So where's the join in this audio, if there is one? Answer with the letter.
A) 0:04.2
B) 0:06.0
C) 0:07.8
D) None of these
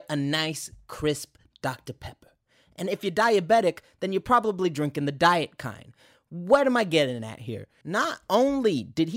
C